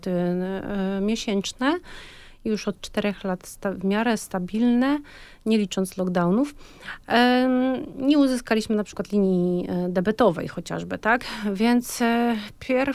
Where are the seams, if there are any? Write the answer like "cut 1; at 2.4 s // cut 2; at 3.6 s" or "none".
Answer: none